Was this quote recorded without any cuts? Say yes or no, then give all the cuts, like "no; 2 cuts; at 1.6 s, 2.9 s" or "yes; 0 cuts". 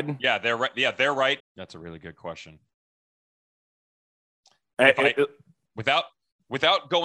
no; 2 cuts; at 1.4 s, 5.7 s